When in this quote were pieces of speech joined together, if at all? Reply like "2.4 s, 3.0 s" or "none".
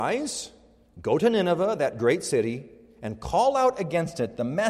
none